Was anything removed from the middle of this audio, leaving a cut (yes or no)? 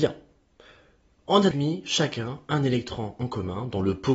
yes